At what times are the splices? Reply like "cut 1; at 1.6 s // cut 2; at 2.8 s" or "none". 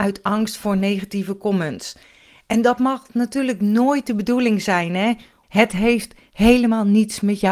cut 1; at 5.4 s